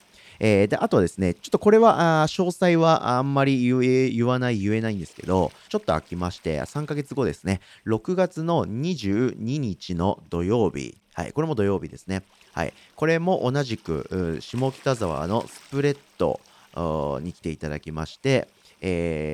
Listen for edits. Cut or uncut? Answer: cut